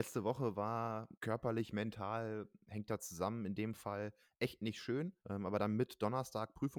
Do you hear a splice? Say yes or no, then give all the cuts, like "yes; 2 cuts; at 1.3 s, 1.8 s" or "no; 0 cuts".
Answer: yes; 2 cuts; at 1.1 s, 5.2 s